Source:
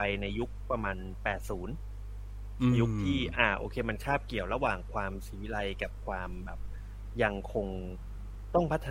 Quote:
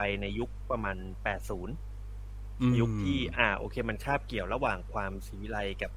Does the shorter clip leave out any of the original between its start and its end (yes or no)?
no